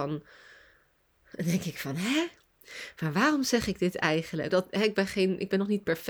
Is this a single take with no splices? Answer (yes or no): no